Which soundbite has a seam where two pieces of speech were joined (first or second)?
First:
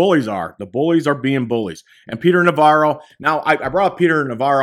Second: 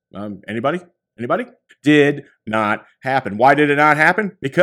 second